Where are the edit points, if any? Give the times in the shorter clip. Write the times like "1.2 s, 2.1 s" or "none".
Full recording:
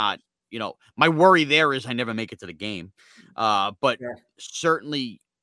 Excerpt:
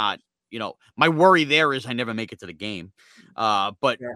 none